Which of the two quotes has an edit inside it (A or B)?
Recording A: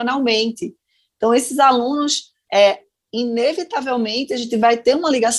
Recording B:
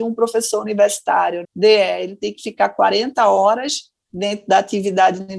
B